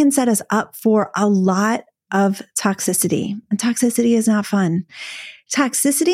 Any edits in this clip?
no; 0 cuts

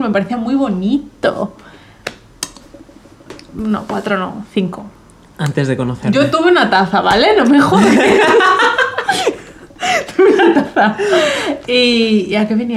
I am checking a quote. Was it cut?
no; 0 cuts

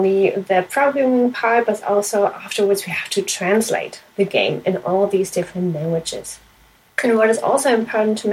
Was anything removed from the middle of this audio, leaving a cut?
no; 0 cuts

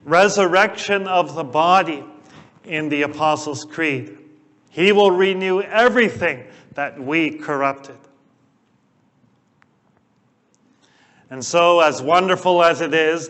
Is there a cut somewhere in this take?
yes; 1 cut; at 4.7 s

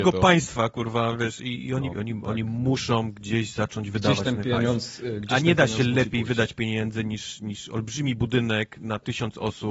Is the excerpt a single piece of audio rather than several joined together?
no; 1 cut; at 1.9 s

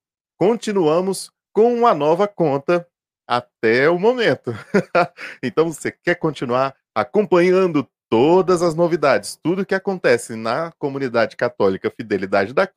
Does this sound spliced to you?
no; 0 cuts

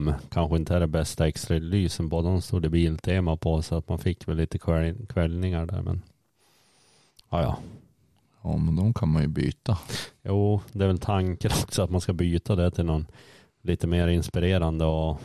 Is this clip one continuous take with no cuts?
yes; 0 cuts

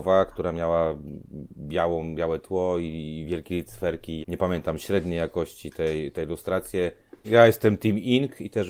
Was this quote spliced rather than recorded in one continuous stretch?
yes; 2 cuts; at 4.2 s, 7.2 s

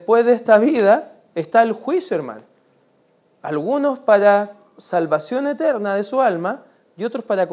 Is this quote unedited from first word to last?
yes; 0 cuts

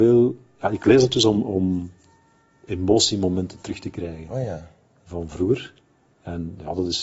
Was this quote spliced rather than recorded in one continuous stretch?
no; 0 cuts

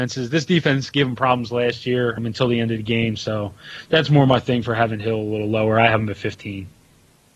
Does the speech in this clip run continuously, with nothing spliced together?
no; 1 cut; at 2.2 s

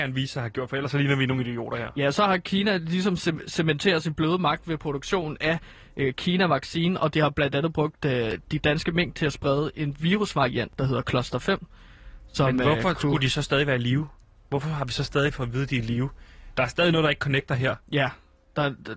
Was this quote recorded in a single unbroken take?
yes; 0 cuts

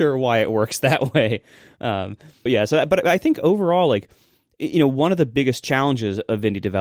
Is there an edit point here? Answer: yes; 1 cut; at 2.5 s

